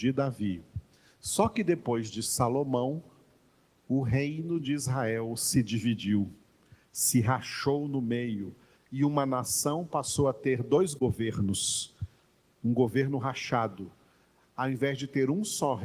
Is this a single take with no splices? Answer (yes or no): no